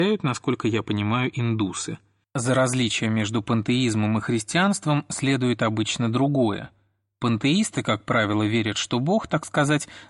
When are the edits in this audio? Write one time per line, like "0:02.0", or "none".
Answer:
0:02.2